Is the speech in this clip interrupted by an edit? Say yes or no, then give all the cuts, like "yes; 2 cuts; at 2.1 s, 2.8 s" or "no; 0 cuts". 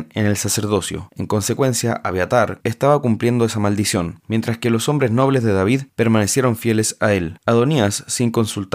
yes; 1 cut; at 2.6 s